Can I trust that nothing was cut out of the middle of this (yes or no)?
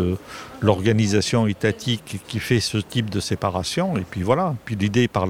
no